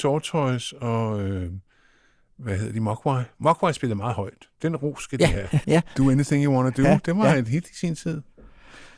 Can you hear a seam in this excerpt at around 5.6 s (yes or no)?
yes